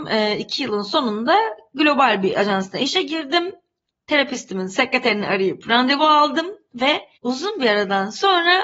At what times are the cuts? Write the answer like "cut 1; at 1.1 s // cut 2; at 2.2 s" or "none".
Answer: cut 1; at 7.2 s